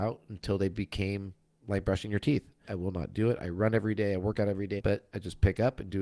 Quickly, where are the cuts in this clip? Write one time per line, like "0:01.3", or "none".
0:02.7
0:04.8